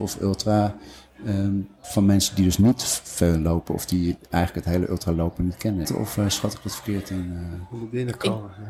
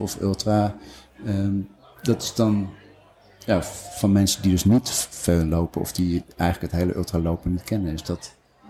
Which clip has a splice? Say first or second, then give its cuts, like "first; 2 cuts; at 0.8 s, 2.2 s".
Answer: first; 2 cuts; at 1.8 s, 5.8 s